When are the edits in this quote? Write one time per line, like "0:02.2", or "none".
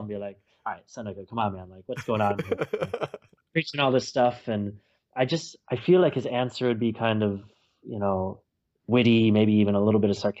none